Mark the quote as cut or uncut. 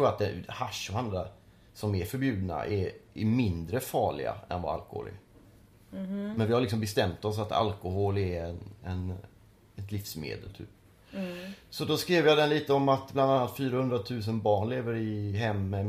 uncut